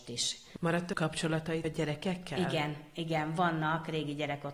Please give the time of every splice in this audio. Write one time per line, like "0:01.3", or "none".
none

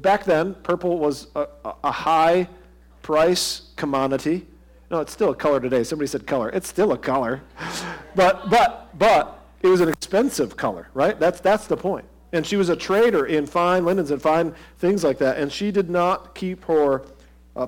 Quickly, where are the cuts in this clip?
none

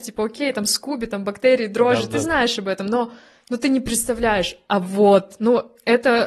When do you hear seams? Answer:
none

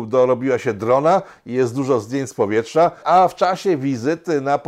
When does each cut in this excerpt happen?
0:03.0

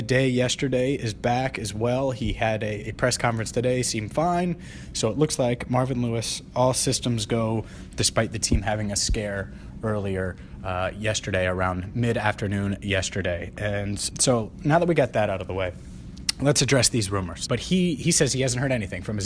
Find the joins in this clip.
0:14.1
0:17.5

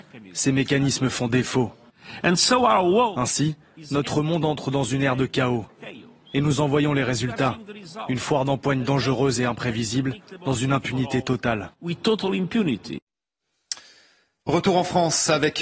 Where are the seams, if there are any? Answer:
none

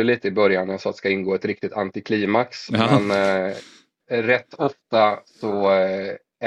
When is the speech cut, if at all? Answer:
0:04.0

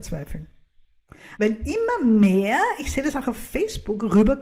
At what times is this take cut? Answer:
0:01.4

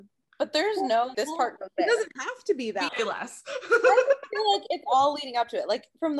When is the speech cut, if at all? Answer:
0:01.1
0:02.9

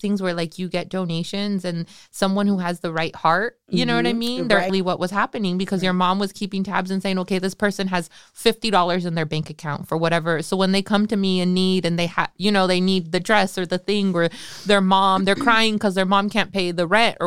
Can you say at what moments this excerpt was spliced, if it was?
0:04.7

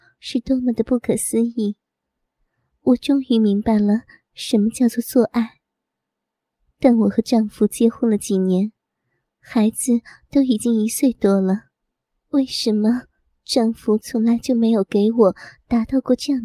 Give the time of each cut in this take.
none

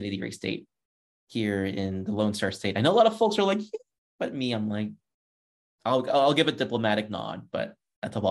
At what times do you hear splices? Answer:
none

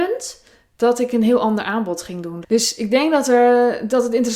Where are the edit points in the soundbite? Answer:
0:02.4

